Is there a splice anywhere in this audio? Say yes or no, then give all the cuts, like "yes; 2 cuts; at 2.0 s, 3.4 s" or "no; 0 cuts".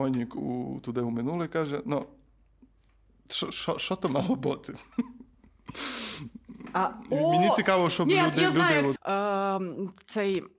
yes; 1 cut; at 8.9 s